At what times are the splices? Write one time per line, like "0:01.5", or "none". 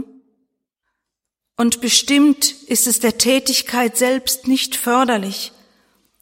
none